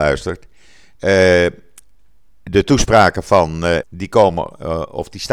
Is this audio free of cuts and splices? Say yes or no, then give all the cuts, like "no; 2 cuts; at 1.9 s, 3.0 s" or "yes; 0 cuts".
no; 1 cut; at 3.8 s